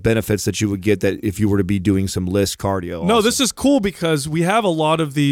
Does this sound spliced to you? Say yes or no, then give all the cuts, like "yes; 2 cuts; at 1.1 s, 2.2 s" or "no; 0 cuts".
no; 0 cuts